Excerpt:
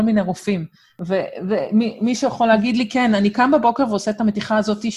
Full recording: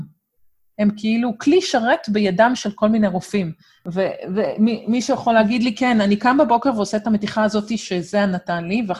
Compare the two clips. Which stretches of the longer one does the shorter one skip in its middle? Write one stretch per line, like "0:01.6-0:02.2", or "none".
none